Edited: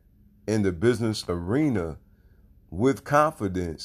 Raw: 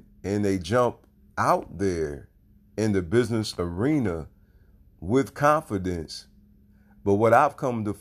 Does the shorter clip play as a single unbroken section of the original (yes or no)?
yes